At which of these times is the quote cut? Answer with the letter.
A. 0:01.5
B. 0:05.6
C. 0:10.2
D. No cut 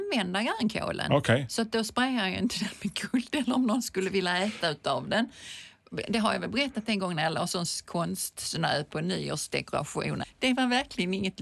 C